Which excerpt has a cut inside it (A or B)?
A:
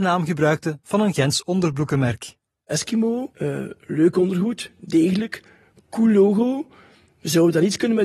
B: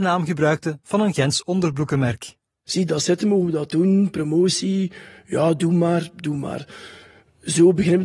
B